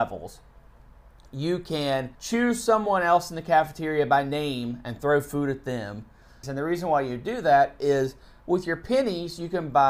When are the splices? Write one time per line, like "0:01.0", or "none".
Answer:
0:02.1
0:06.4